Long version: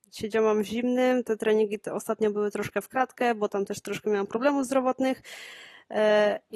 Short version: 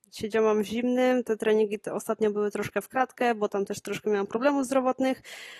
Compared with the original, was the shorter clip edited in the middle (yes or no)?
no